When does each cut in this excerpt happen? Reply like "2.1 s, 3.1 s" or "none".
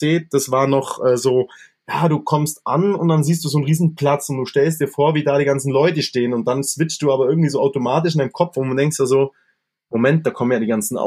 none